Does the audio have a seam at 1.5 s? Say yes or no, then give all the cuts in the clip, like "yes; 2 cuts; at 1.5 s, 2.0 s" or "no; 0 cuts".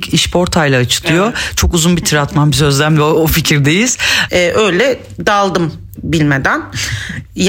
no; 2 cuts; at 4.3 s, 6.0 s